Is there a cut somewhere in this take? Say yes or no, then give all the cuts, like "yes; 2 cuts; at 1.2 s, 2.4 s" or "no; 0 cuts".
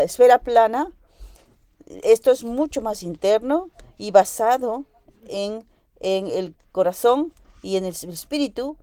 no; 0 cuts